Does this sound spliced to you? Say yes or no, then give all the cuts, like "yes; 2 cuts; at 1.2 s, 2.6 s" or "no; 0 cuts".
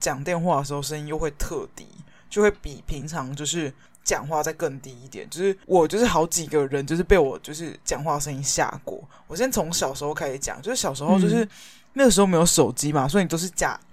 no; 0 cuts